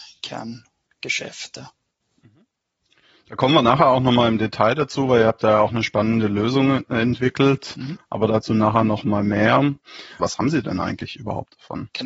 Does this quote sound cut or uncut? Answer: cut